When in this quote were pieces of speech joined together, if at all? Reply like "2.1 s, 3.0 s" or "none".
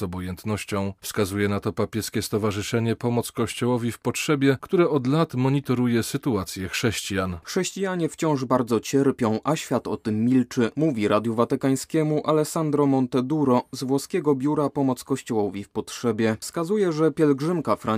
7.4 s